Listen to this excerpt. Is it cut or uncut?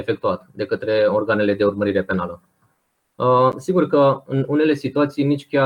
uncut